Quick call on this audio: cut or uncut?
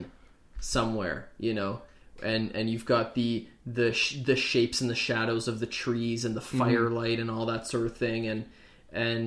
uncut